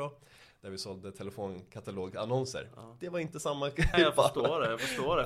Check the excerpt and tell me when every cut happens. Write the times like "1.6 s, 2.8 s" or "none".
3.9 s

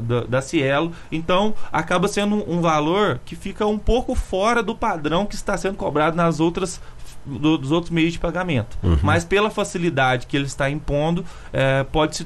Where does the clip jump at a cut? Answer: none

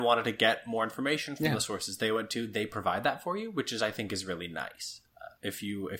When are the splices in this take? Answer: none

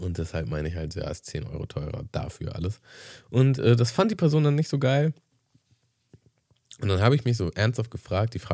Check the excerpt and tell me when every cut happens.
none

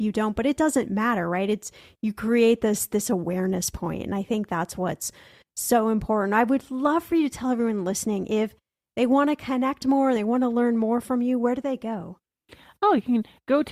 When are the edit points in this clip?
none

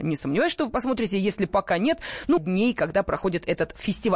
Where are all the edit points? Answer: 2.4 s

